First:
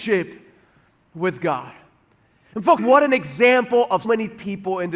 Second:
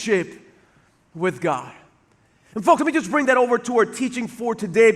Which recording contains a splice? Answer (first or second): first